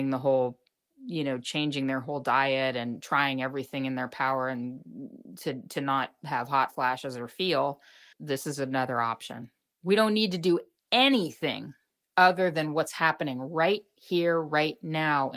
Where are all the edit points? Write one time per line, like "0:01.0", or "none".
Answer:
0:08.1
0:09.7